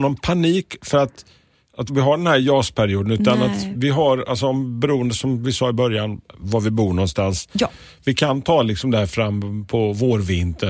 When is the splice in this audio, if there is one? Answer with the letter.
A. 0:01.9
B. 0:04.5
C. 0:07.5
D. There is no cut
A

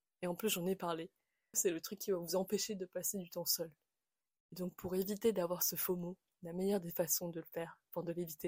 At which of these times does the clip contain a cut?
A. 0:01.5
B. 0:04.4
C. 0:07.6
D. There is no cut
A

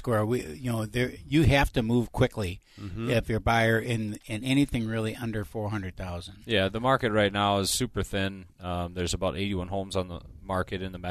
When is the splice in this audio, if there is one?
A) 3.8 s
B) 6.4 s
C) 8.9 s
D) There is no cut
D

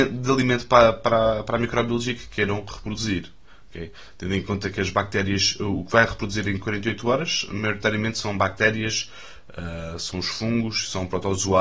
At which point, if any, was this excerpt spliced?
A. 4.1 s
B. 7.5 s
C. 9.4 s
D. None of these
D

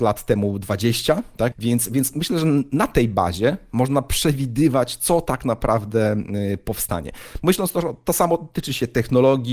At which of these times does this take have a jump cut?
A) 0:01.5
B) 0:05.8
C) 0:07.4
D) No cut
A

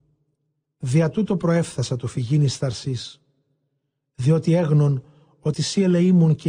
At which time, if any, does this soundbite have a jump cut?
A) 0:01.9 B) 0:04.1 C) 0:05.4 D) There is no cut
D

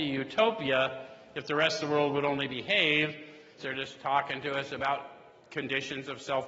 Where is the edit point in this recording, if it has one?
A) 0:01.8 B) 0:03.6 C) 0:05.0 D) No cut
B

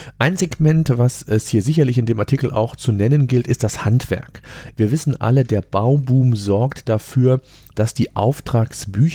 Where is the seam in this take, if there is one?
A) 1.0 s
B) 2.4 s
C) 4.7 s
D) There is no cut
C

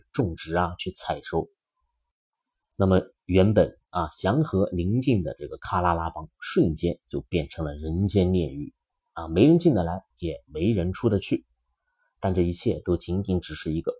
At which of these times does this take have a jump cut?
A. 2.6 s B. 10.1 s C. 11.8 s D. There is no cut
D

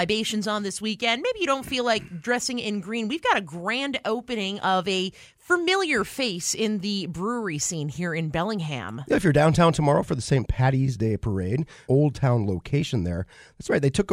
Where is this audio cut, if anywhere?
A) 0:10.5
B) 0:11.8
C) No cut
B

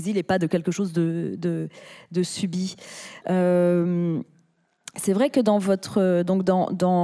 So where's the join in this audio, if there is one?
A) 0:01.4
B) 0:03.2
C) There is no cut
B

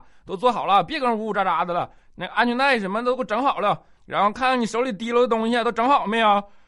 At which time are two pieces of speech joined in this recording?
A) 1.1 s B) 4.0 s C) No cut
B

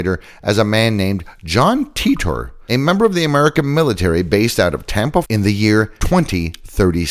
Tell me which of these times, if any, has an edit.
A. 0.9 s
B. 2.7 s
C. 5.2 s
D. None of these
C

